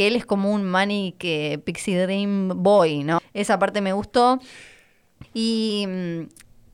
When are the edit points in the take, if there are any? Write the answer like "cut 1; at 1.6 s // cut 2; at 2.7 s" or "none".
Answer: cut 1; at 3.2 s // cut 2; at 5.2 s